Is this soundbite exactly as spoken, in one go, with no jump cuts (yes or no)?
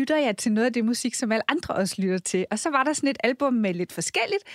yes